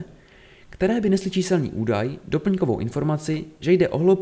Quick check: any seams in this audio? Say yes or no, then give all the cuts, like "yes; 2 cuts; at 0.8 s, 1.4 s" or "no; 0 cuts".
no; 0 cuts